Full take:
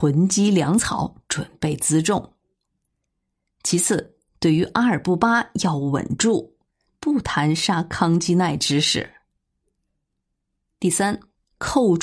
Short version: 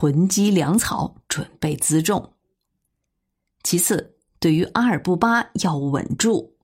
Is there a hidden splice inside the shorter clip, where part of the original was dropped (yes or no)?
no